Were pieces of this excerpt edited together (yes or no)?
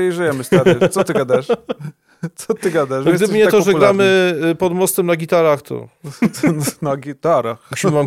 no